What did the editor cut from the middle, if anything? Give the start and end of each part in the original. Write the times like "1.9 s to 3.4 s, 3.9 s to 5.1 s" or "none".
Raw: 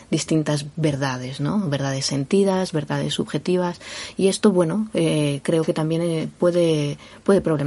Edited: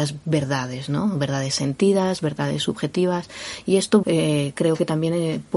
4.5 s to 4.9 s

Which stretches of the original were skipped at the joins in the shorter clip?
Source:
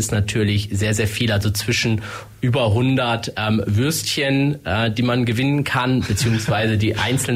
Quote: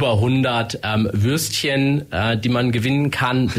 none

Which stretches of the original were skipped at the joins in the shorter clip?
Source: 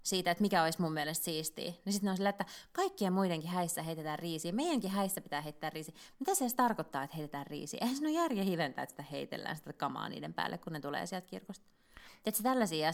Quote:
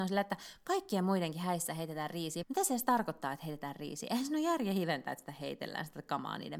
4.5 s to 6.1 s

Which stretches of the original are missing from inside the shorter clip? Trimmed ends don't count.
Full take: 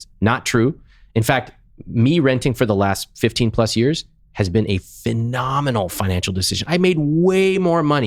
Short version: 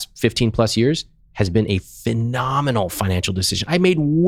none

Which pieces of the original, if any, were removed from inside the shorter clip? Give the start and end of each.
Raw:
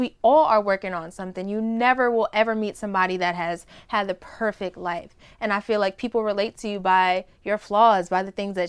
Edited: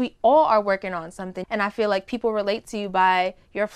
1.4 s to 5.3 s

